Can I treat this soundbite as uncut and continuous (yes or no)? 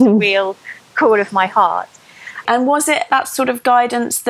no